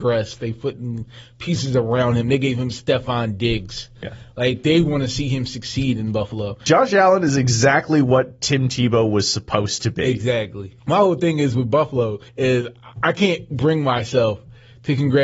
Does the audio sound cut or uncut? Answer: cut